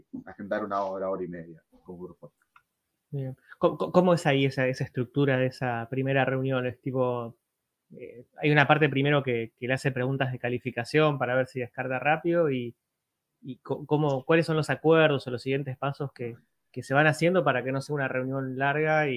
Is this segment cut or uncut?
uncut